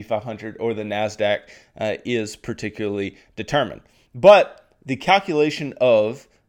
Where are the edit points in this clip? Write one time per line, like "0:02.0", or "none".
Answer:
none